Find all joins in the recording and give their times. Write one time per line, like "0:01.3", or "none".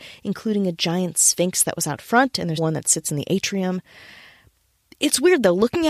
0:02.6